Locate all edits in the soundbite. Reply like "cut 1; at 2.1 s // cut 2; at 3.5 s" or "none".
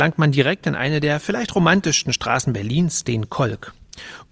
none